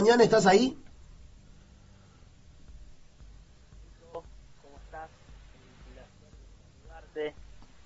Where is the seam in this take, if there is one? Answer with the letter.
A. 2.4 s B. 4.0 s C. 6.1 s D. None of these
D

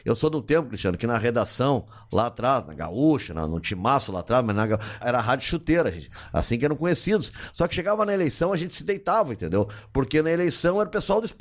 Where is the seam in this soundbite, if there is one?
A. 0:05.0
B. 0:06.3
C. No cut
A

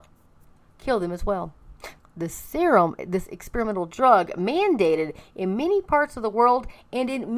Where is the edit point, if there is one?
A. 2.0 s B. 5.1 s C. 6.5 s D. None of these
A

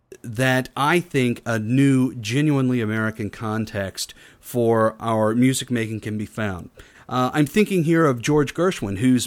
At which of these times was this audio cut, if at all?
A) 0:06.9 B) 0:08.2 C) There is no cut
A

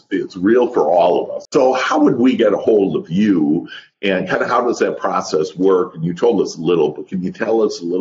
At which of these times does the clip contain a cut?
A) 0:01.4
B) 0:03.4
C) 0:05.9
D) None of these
A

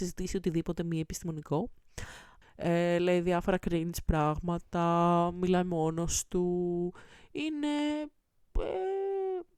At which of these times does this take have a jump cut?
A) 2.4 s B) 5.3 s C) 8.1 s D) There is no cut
A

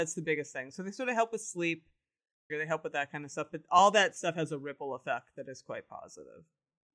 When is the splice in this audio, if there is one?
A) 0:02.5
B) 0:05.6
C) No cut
A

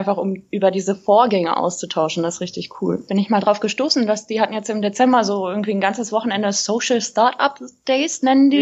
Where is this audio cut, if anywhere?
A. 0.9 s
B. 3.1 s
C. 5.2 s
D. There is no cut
B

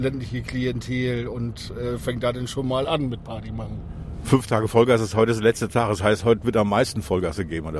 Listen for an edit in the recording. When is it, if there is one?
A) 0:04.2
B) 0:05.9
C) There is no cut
A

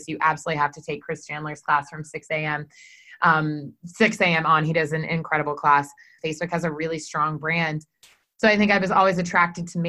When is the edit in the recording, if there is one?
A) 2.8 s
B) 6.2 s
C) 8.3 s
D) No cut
B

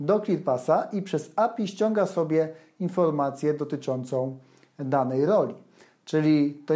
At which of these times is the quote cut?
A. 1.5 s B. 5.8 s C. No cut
C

